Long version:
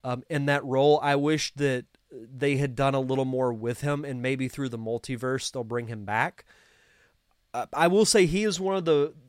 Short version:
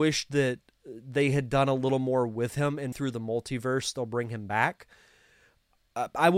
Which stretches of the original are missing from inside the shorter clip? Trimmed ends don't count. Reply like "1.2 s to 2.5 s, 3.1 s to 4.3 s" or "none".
4.2 s to 4.5 s